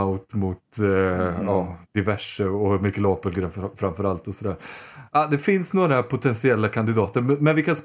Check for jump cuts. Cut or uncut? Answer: cut